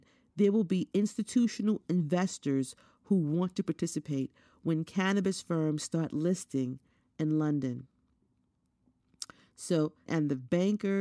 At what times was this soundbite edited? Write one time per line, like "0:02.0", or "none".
0:10.1